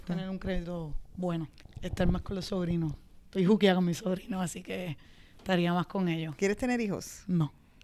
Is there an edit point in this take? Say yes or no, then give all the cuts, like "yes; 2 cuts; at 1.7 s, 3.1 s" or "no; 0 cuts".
yes; 1 cut; at 1.6 s